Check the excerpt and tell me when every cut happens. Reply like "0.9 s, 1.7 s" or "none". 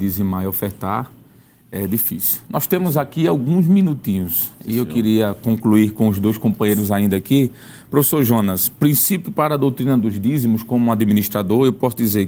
none